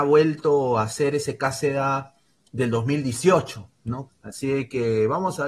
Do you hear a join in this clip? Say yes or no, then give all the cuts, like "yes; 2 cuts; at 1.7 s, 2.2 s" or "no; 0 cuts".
yes; 1 cut; at 4.1 s